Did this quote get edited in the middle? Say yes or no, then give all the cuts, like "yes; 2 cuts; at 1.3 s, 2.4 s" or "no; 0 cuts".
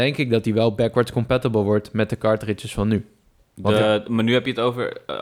no; 0 cuts